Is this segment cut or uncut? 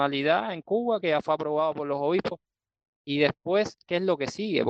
cut